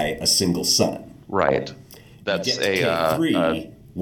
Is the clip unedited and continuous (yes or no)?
no